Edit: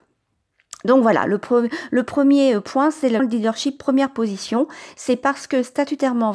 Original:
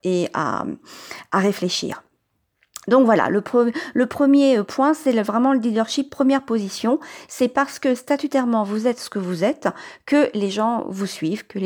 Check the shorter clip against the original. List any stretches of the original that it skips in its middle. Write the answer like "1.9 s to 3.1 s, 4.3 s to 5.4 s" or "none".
5.2 s to 5.5 s

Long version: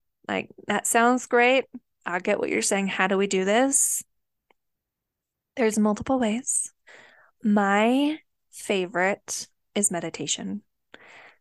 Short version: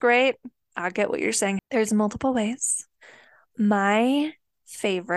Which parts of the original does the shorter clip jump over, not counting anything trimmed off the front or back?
2.9 s to 5.4 s

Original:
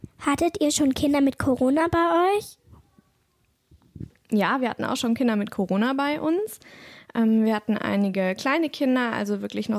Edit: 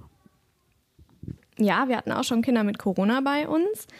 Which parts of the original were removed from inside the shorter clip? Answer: none

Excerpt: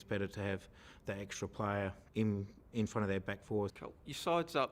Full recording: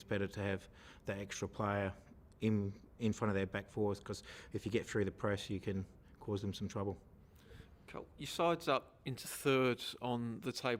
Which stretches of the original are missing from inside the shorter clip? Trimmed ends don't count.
2.1 s to 2.3 s, 4.0 s to 7.8 s

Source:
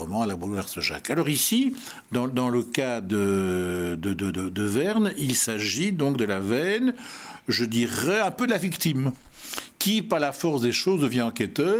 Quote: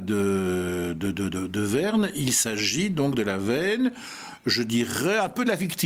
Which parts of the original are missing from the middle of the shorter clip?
none

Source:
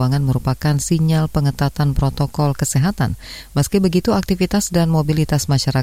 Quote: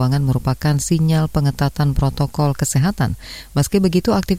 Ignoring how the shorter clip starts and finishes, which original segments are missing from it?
none

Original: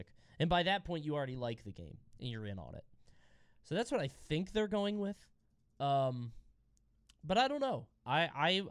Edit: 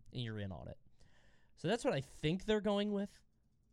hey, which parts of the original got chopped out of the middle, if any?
none

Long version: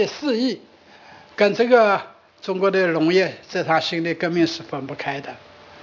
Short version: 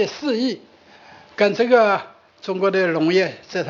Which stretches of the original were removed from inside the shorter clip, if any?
none

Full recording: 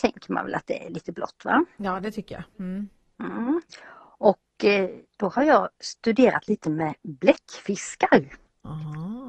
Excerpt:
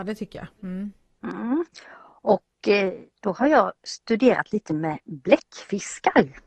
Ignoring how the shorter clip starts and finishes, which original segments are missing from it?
none

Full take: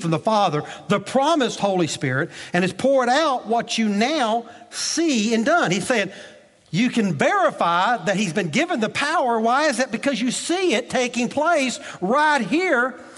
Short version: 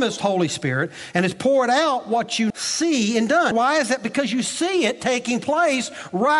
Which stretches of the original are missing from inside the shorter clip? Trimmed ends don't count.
3.9 s to 4.7 s, 5.7 s to 9.4 s

